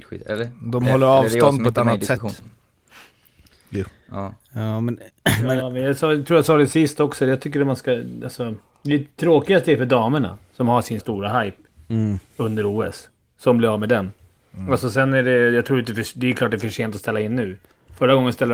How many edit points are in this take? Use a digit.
1